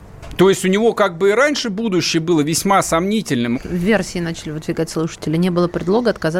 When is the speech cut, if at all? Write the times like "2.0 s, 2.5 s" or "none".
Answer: 3.6 s